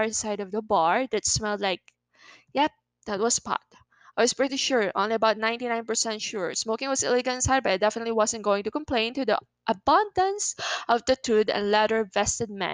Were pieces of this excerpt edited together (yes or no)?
no